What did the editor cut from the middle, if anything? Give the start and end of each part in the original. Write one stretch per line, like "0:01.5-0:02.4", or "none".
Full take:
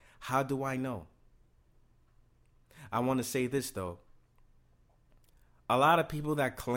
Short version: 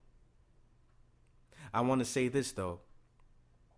none